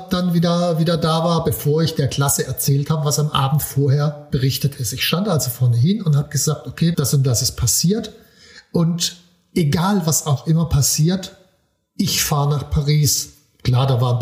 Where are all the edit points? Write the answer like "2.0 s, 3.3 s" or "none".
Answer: 6.9 s